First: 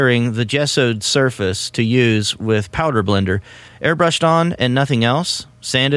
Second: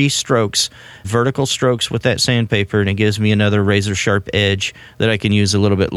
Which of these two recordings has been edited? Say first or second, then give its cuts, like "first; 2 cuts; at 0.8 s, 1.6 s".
second; 1 cut; at 1.0 s